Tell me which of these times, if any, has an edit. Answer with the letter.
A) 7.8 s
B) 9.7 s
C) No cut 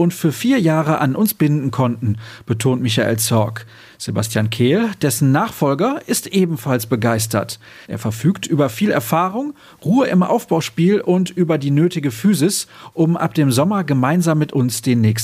A